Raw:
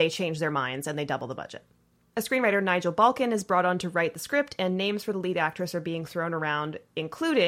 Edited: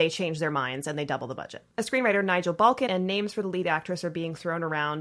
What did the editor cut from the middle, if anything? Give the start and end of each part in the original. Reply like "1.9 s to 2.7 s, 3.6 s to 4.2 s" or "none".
1.7 s to 2.1 s, 3.2 s to 4.6 s